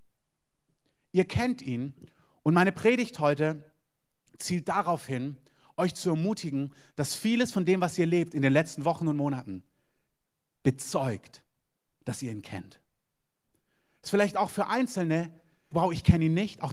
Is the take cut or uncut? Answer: cut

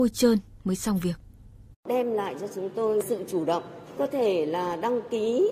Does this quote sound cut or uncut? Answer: cut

